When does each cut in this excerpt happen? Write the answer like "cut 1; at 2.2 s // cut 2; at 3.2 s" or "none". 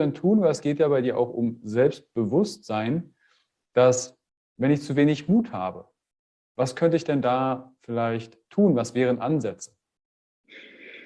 none

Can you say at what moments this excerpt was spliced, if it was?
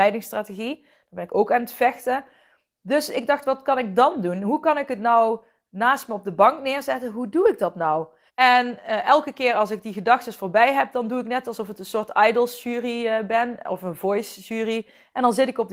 cut 1; at 8.3 s

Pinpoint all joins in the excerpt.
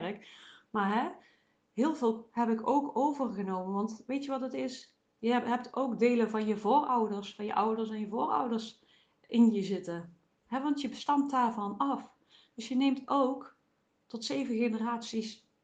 none

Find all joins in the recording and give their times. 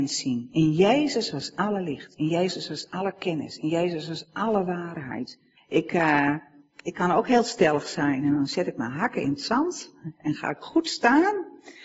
cut 1; at 5.6 s

